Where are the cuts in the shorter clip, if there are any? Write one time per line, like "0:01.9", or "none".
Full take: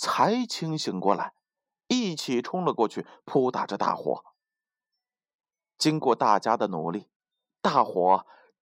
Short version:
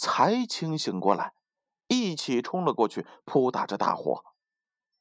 none